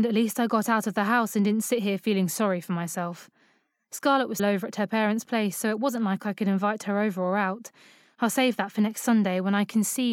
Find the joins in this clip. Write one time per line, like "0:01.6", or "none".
0:04.4
0:08.2